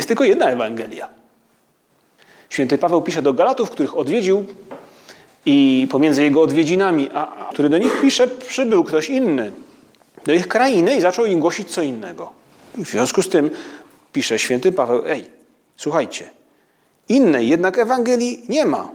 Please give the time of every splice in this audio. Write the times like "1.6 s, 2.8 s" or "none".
7.5 s